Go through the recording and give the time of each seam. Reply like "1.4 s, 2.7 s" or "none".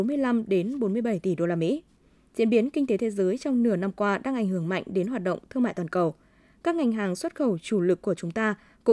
none